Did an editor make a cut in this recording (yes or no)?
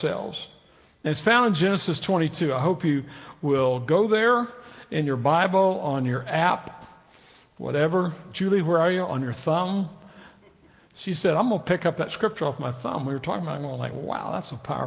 no